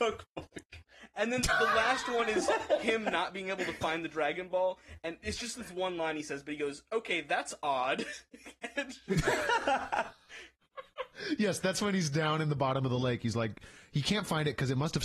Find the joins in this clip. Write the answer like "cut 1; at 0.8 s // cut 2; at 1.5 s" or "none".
none